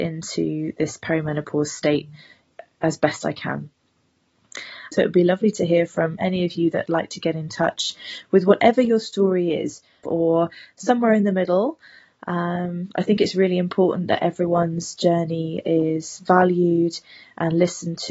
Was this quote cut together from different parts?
yes; 2 cuts; at 4.9 s, 10.0 s

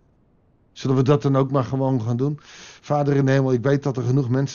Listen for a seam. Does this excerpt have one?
no; 0 cuts

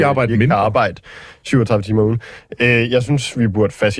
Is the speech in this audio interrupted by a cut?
no; 0 cuts

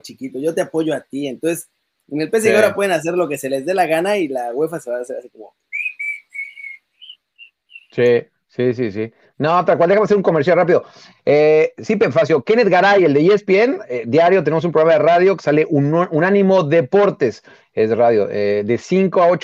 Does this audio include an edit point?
no; 0 cuts

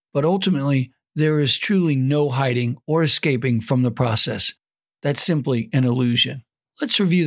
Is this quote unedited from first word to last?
yes; 0 cuts

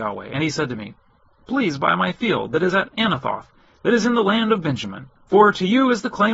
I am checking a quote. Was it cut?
yes; 1 cut; at 5.2 s

